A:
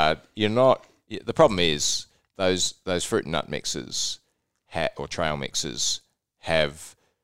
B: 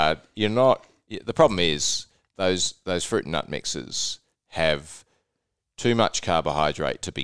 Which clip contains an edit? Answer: B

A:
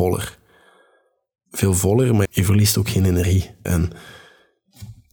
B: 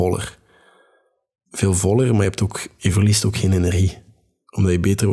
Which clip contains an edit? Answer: A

